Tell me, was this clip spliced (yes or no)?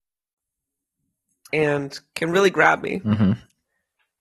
yes